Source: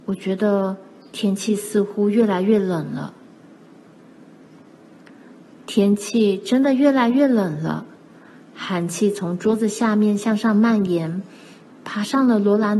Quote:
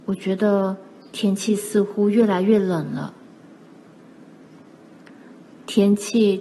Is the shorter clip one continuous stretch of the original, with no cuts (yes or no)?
yes